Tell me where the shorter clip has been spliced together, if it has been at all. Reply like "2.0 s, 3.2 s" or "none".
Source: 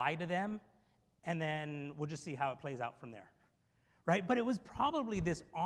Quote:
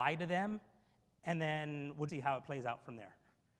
2.1 s